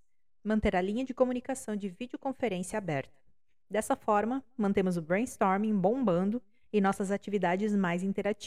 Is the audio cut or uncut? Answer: uncut